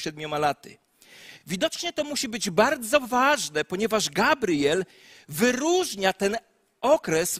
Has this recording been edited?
no; 0 cuts

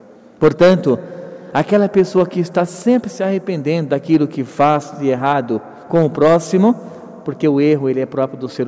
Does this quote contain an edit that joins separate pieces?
no; 0 cuts

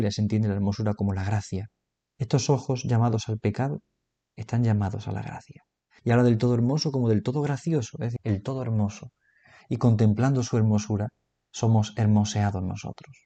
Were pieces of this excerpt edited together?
yes; 3 cuts; at 2.2 s, 6.0 s, 8.2 s

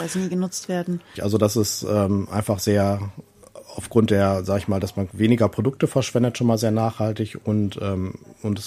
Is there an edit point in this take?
yes; 1 cut; at 1.2 s

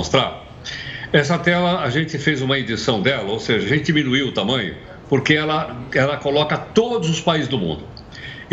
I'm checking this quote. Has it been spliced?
no; 0 cuts

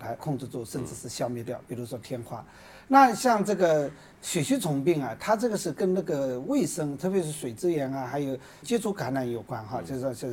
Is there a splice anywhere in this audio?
no; 0 cuts

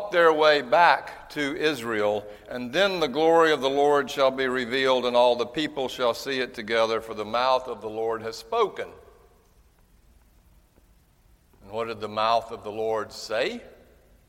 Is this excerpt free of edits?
yes; 0 cuts

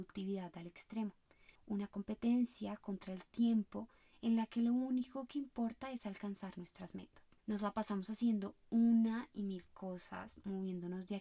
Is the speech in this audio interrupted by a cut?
yes; 1 cut; at 1.6 s

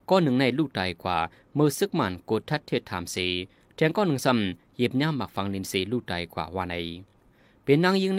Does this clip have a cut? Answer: no; 0 cuts

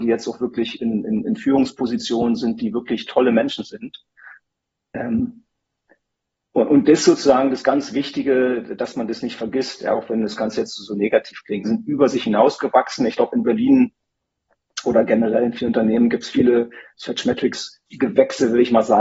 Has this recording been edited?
yes; 1 cut; at 11.6 s

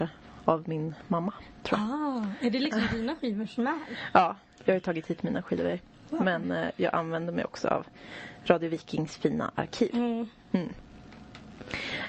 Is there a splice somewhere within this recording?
no; 0 cuts

